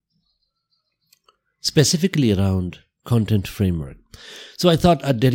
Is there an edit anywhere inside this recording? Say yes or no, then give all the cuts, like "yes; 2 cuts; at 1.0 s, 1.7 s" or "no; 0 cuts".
no; 0 cuts